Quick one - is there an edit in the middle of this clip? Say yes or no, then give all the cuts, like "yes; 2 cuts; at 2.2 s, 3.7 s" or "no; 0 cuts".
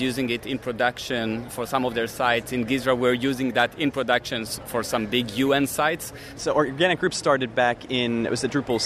yes; 2 cuts; at 1.5 s, 6.4 s